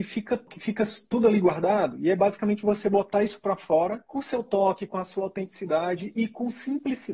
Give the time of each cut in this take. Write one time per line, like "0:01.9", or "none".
none